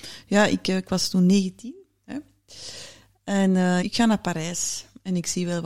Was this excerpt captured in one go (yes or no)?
no